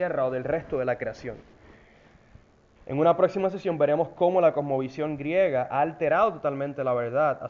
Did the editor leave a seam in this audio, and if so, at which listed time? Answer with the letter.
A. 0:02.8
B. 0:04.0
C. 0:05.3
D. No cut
A